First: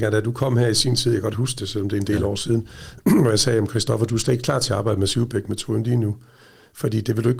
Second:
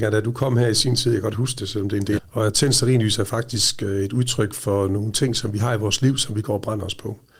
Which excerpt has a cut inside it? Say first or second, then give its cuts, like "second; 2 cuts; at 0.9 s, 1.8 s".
second; 1 cut; at 2.2 s